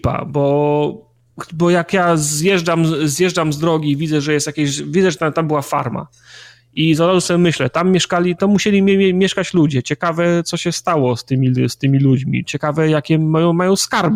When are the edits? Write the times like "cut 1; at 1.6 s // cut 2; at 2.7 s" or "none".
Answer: none